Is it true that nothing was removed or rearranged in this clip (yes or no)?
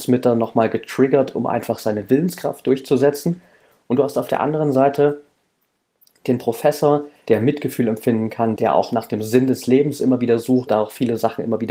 no